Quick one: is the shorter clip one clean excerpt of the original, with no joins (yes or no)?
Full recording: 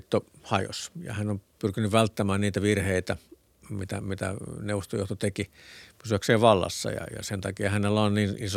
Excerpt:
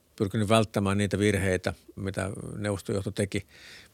no